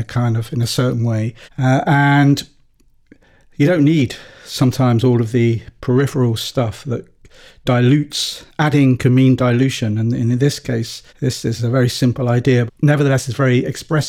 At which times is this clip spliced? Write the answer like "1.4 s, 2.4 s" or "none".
1.4 s, 11.1 s, 12.7 s